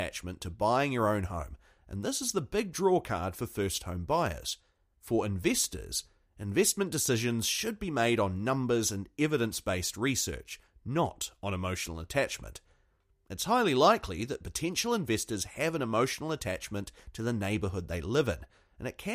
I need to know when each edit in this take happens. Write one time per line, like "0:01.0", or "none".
0:04.9